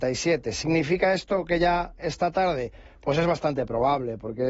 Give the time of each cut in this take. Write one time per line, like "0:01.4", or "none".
0:02.0